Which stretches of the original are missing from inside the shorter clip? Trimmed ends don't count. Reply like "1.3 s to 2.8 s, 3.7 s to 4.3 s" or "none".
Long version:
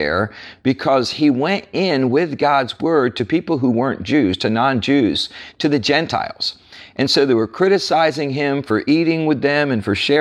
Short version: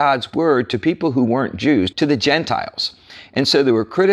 4.4 s to 5.5 s